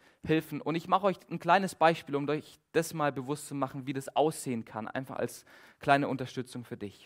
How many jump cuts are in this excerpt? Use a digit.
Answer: 0